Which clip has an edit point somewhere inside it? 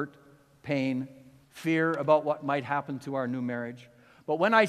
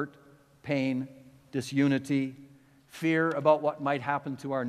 first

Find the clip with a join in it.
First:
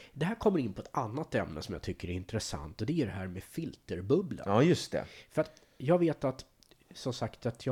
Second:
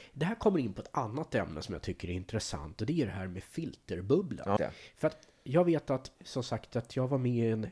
second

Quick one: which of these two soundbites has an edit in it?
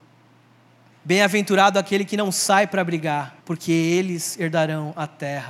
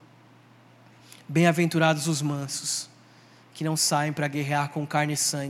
first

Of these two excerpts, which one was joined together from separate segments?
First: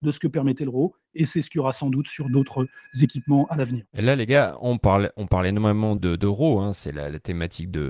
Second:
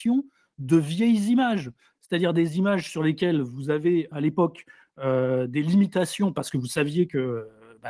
first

